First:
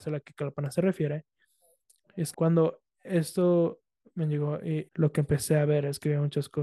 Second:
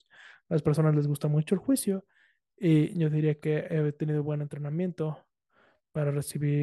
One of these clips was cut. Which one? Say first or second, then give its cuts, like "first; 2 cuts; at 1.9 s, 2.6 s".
first; 2 cuts; at 2.3 s, 4.9 s